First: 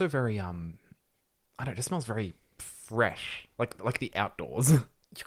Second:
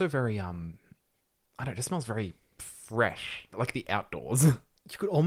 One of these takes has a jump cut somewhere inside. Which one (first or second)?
second